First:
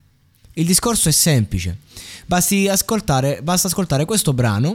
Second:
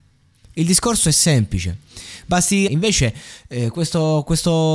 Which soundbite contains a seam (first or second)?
second